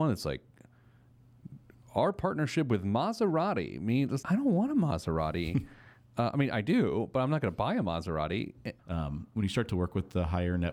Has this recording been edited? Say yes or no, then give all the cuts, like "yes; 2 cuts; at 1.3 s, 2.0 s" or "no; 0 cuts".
yes; 2 cuts; at 4.2 s, 8.8 s